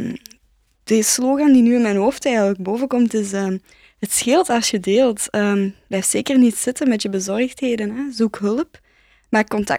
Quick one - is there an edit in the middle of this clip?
no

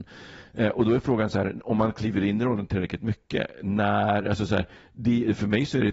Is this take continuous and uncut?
yes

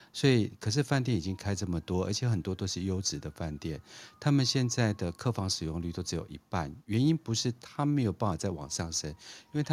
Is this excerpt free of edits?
yes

